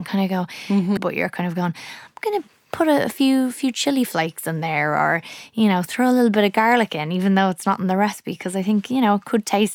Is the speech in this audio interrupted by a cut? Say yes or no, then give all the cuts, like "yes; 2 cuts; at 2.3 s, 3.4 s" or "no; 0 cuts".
yes; 1 cut; at 1.0 s